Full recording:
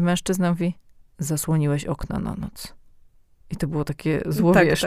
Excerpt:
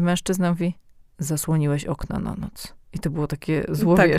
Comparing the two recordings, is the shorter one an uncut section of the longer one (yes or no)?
no